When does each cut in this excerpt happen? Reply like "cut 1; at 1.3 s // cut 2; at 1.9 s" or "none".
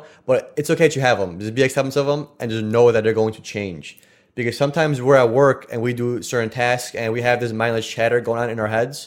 none